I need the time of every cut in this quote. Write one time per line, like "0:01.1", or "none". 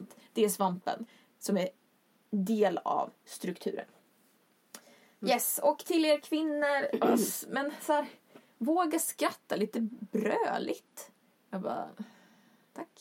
0:11.3